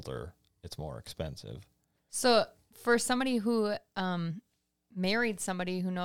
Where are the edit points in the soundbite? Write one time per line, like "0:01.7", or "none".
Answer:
none